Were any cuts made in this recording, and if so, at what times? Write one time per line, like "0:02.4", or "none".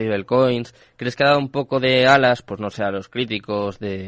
none